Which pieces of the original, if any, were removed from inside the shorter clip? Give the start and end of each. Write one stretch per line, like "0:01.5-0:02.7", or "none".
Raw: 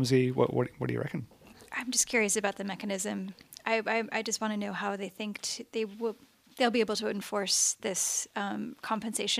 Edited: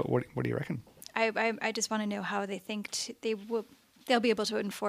0:01.4-0:03.5